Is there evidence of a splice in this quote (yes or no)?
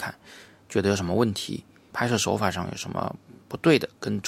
yes